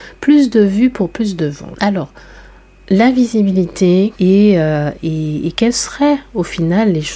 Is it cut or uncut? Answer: cut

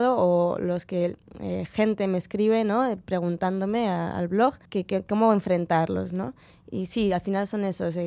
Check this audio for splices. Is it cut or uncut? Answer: cut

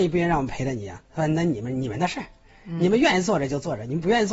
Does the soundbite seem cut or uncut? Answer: uncut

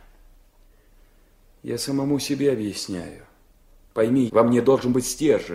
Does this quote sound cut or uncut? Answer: cut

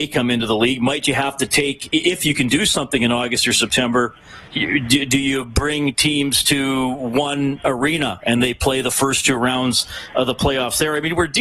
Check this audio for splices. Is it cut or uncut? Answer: cut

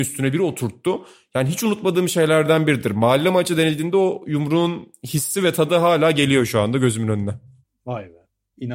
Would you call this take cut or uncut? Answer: uncut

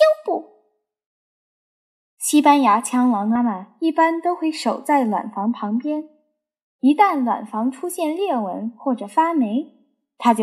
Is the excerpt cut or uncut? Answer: cut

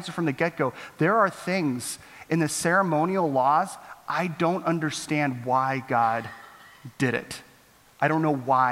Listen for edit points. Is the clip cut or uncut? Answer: uncut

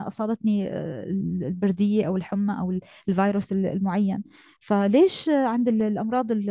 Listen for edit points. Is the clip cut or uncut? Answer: uncut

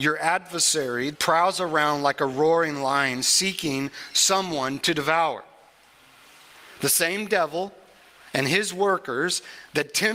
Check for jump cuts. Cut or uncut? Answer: cut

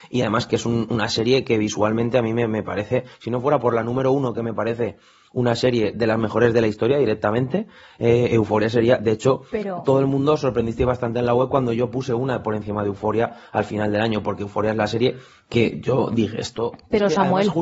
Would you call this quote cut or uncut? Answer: uncut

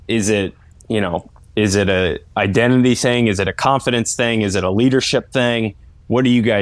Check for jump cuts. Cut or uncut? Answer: uncut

